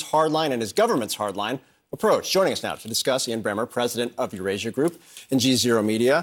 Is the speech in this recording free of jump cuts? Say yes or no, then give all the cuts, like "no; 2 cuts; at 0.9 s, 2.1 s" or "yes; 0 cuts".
yes; 0 cuts